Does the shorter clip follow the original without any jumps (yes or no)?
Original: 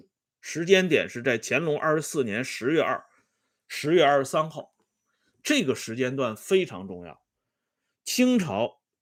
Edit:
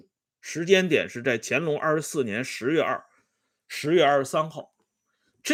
yes